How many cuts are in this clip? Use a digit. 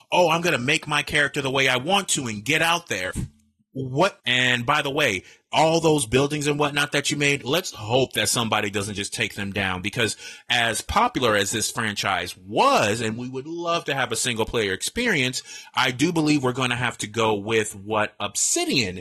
2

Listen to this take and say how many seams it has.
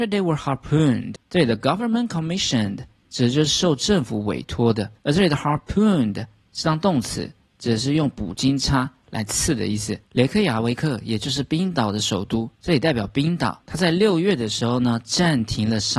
1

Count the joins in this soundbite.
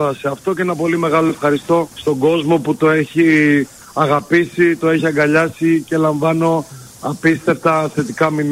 1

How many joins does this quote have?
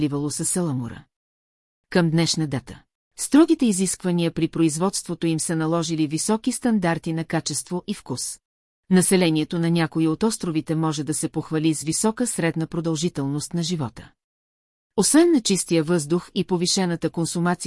2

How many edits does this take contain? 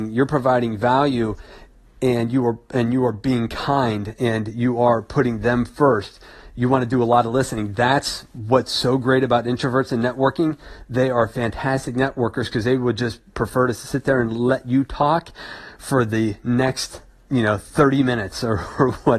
0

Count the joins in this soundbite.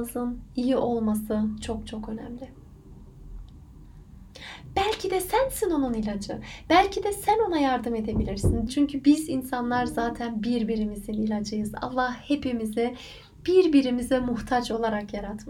1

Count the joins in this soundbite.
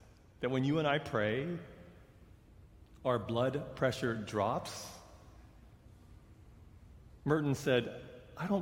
1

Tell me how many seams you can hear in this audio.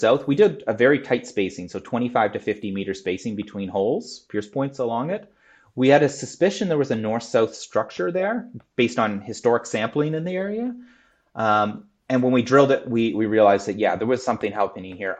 0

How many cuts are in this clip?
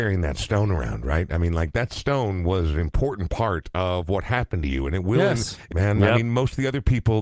1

